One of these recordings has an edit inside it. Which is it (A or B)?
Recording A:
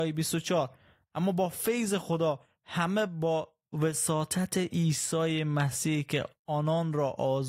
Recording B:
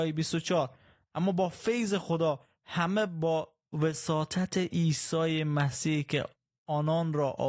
A